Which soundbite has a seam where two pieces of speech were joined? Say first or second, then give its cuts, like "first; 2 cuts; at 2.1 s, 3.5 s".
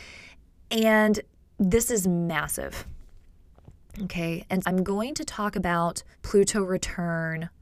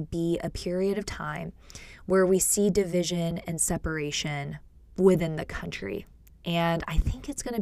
first; 2 cuts; at 4.6 s, 6.1 s